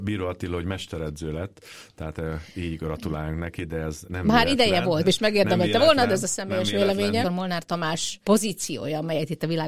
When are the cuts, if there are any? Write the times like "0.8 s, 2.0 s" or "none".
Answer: 5.0 s, 7.2 s